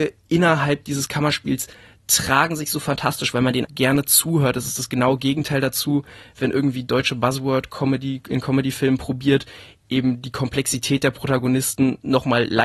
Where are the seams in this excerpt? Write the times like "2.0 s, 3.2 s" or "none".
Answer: 3.6 s